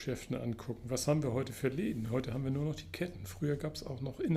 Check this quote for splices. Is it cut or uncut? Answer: uncut